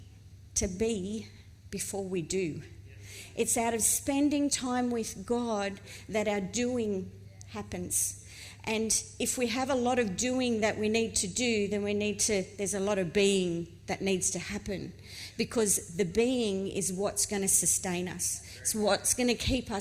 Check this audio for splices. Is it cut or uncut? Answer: uncut